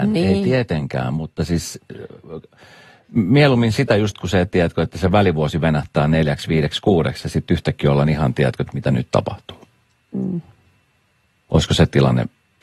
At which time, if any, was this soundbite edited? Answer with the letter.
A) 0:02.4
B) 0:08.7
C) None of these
B